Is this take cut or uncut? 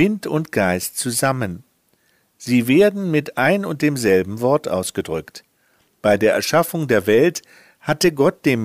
cut